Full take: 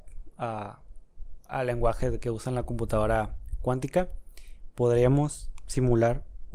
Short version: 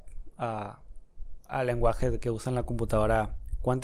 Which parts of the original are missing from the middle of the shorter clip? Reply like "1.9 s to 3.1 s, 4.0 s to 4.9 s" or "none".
none